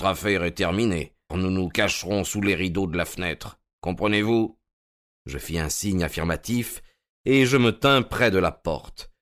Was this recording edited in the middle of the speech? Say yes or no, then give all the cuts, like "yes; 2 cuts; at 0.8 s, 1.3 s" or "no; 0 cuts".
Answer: yes; 1 cut; at 1.3 s